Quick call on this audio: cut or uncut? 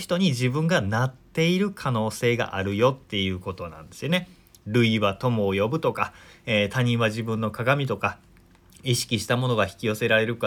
uncut